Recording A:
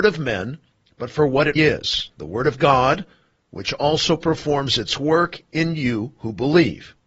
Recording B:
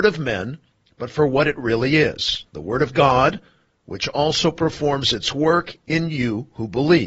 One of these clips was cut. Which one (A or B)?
A